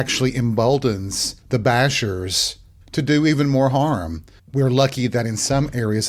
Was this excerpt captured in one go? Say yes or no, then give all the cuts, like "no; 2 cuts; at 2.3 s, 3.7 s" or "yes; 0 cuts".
no; 3 cuts; at 1.4 s, 2.8 s, 4.4 s